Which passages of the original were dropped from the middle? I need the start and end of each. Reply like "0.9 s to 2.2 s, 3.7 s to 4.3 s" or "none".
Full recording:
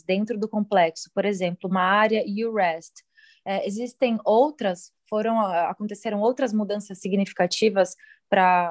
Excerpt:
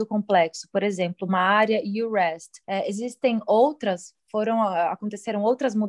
3.1 s to 3.4 s